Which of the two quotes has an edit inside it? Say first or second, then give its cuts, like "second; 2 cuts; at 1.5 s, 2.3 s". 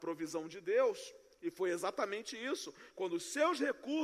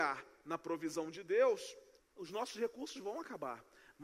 second; 1 cut; at 2.0 s